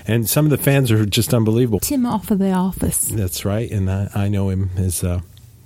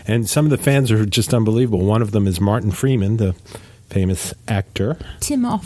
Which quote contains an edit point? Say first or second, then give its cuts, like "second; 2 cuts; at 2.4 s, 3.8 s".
first; 1 cut; at 1.8 s